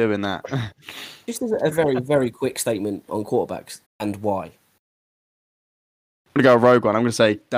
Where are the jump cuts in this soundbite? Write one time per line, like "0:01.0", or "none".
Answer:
0:01.7
0:03.8